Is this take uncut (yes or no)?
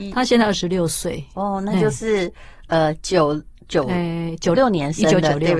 no